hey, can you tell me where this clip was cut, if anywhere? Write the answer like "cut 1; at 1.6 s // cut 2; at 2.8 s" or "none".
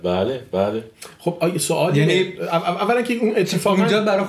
none